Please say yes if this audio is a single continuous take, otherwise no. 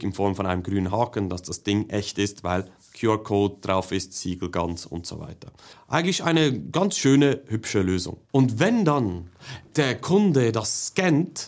no